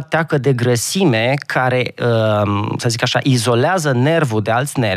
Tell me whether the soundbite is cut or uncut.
uncut